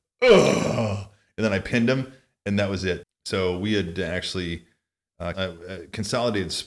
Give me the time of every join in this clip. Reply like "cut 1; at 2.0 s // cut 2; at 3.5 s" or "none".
cut 1; at 3.0 s // cut 2; at 5.3 s

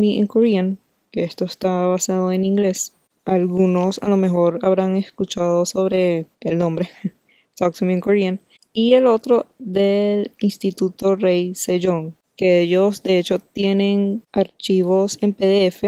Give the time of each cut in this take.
cut 1; at 6.3 s

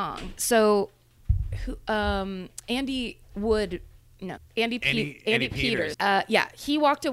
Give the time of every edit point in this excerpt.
cut 1; at 4.4 s // cut 2; at 5.9 s

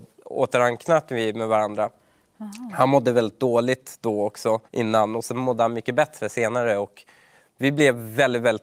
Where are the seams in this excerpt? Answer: cut 1; at 4.7 s

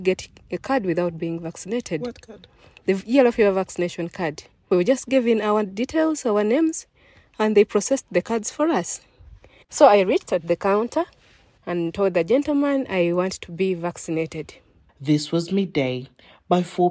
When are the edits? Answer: cut 1; at 4.7 s // cut 2; at 9.6 s // cut 3; at 14.9 s

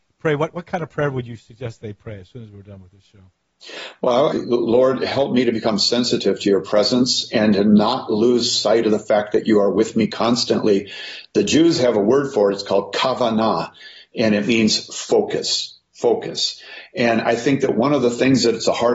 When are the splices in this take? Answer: cut 1; at 4.3 s

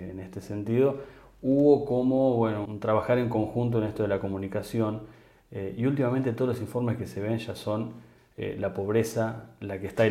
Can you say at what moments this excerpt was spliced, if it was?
cut 1; at 2.7 s

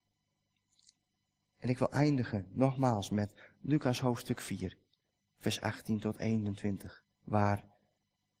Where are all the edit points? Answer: cut 1; at 7.1 s

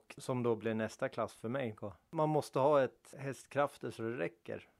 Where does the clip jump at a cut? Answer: cut 1; at 1.8 s

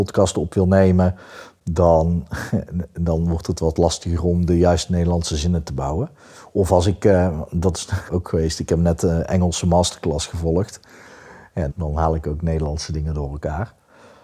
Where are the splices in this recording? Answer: cut 1; at 8.1 s // cut 2; at 11.7 s

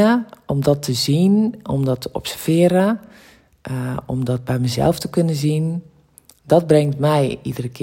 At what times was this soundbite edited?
none

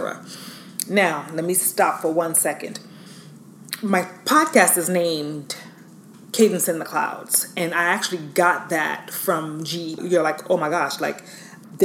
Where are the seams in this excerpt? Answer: cut 1; at 10.0 s

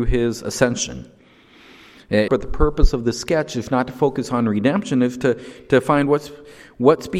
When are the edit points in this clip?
cut 1; at 2.3 s

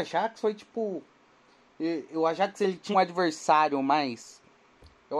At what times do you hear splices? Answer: cut 1; at 2.9 s

